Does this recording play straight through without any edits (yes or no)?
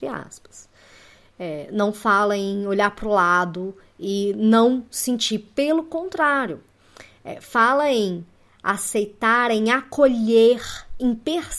yes